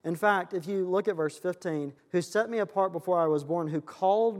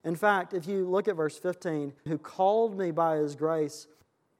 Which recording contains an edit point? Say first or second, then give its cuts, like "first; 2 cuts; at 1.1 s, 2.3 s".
second; 1 cut; at 2.1 s